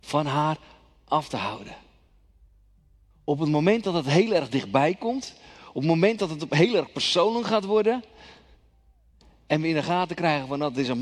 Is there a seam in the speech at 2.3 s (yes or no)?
no